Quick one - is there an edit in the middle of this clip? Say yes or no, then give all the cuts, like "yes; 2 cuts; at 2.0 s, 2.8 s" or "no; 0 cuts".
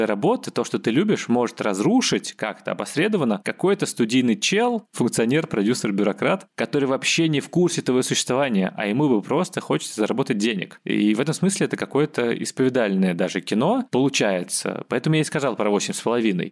no; 0 cuts